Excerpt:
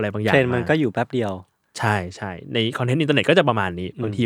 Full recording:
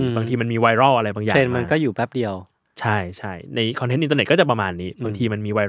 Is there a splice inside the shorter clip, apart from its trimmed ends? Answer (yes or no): no